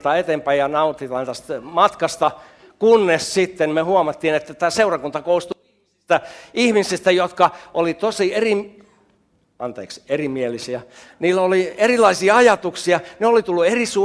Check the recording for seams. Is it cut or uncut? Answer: uncut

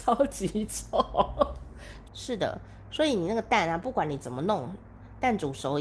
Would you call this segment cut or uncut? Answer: cut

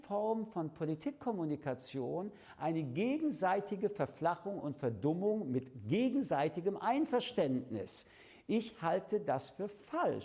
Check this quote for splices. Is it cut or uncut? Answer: uncut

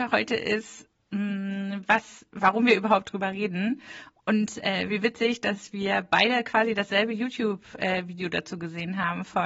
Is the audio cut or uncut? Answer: uncut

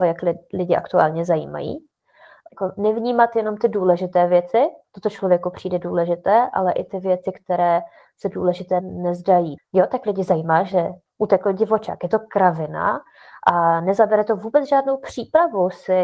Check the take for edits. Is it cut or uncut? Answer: cut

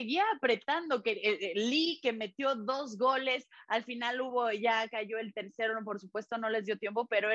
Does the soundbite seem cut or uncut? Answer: uncut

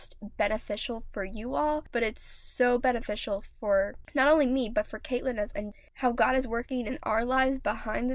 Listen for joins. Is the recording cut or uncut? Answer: cut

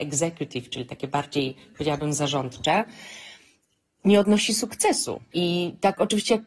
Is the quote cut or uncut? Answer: uncut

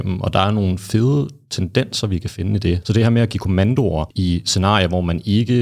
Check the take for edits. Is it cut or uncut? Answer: cut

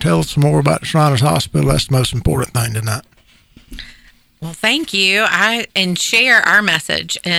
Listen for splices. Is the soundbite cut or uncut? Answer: cut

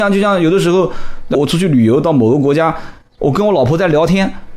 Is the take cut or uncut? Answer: cut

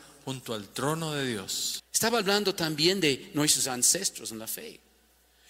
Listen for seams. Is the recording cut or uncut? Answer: cut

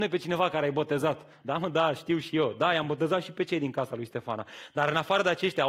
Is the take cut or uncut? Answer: uncut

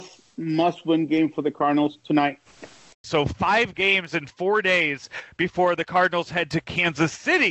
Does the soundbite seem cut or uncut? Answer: cut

